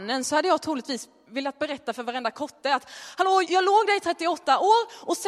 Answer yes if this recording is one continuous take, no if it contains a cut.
no